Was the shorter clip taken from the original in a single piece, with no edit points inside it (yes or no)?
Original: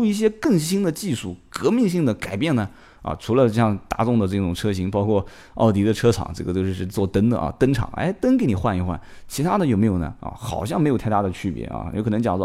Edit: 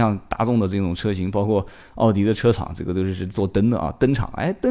yes